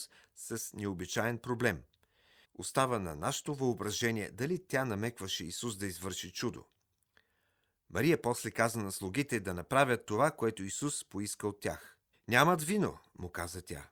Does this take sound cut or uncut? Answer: cut